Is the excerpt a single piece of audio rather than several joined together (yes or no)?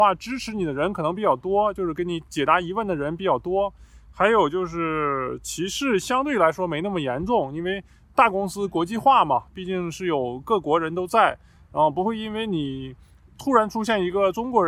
yes